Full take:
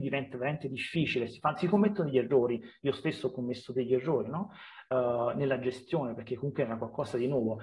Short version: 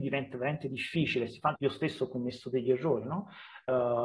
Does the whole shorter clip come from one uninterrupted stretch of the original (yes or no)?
no